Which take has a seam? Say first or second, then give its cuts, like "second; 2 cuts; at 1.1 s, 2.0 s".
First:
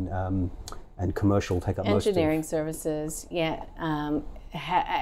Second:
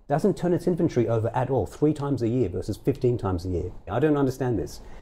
second; 1 cut; at 3.9 s